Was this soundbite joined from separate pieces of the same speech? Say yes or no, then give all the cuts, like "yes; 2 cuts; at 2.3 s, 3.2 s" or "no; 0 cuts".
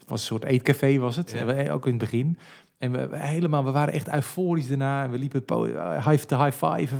no; 0 cuts